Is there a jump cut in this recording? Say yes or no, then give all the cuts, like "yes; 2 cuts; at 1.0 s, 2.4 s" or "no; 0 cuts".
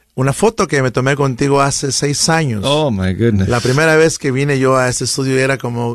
no; 0 cuts